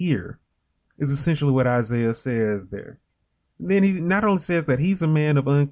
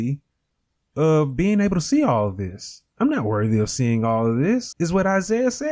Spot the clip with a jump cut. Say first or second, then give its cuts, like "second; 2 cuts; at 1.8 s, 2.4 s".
second; 1 cut; at 4.7 s